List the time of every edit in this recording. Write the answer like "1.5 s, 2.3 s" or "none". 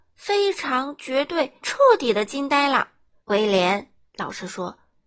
1.6 s, 3.2 s